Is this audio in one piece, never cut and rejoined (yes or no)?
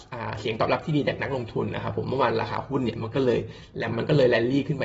no